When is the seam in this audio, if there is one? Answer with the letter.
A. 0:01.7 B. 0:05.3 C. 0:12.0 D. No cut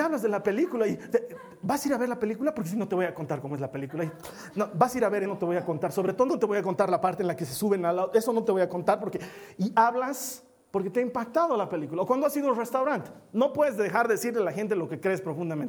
B